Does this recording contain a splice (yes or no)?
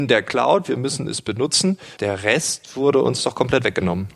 yes